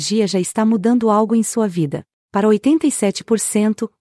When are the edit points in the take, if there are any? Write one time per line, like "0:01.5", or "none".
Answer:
0:02.3